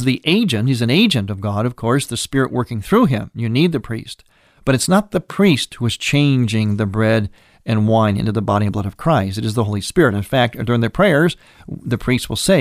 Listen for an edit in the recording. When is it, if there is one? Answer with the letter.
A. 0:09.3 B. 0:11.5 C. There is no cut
C